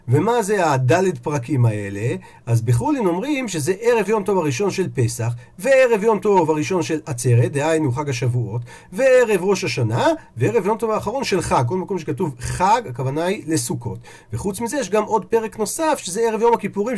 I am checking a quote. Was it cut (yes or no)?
no